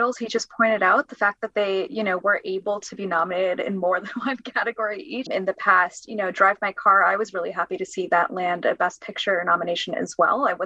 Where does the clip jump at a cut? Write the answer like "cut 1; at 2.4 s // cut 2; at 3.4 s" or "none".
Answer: cut 1; at 5.3 s

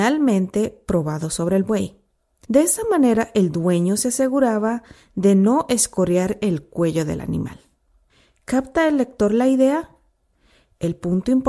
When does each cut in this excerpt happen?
none

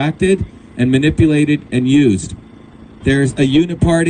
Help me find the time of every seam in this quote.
cut 1; at 3.0 s

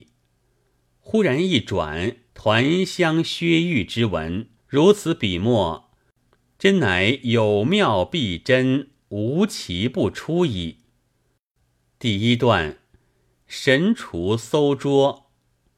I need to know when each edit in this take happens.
cut 1; at 2.3 s // cut 2; at 4.6 s

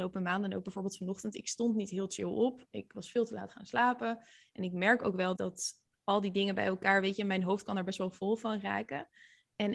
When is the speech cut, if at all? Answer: cut 1; at 5.3 s

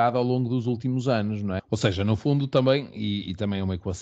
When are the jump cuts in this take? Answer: cut 1; at 1.6 s

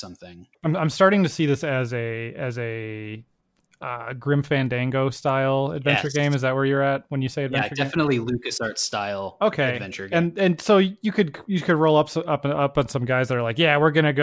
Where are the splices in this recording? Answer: none

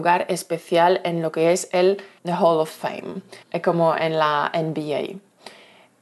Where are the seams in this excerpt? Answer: cut 1; at 2.2 s // cut 2; at 3.4 s

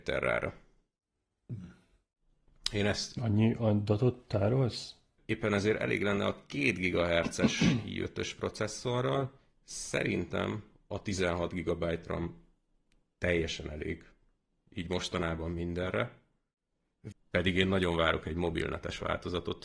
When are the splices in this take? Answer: cut 1; at 5.2 s // cut 2; at 17.1 s

